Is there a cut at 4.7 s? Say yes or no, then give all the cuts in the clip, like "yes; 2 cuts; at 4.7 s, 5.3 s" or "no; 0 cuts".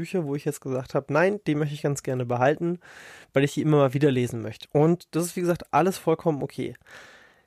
yes; 1 cut; at 4.7 s